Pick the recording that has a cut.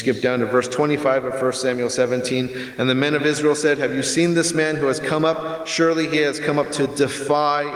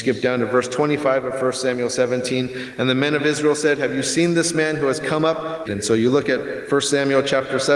second; 1 cut; at 5.7 s

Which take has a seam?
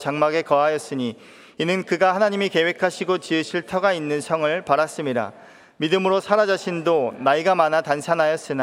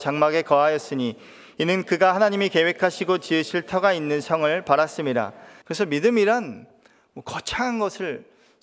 second; 1 cut; at 5.6 s

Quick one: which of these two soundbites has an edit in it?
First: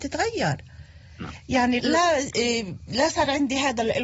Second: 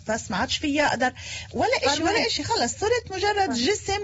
first; 1 cut; at 1.8 s

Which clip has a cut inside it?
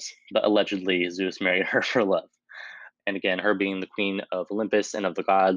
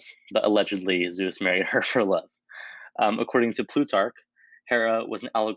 first; 1 cut; at 2.9 s

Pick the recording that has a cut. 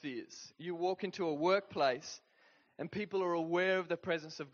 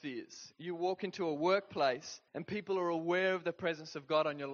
second; 1 cut; at 2.3 s

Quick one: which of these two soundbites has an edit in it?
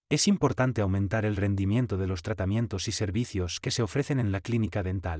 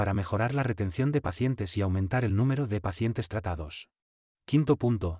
second; 1 cut; at 4.3 s

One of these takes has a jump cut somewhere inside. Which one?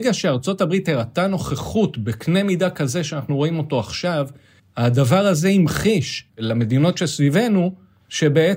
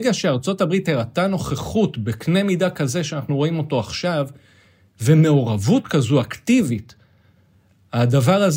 first; 2 cuts; at 4.6 s, 6.3 s

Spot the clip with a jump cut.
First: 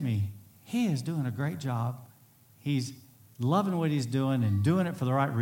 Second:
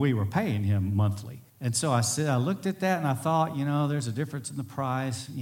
second; 1 cut; at 1.5 s

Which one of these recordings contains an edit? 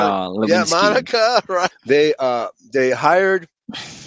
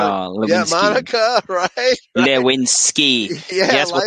first; 1 cut; at 1.7 s

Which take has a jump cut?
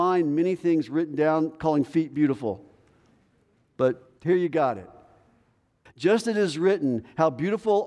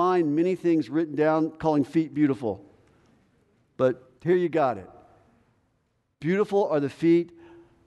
first; 1 cut; at 5.9 s

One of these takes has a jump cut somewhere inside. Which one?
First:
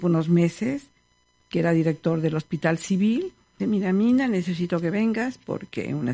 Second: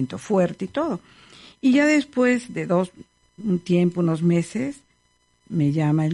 first; 2 cuts; at 1.4 s, 3.6 s

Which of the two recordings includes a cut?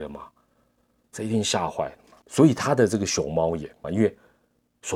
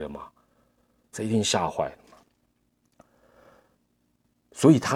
first; 2 cuts; at 2.2 s, 3.8 s

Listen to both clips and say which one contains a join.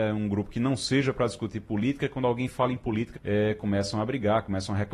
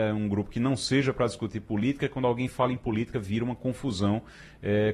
first; 1 cut; at 3.1 s

